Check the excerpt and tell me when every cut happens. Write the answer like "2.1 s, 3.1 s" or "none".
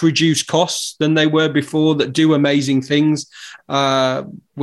3.6 s